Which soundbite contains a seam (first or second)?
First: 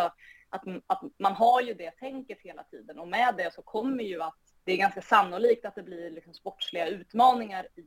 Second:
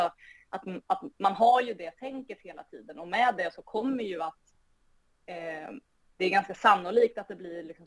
first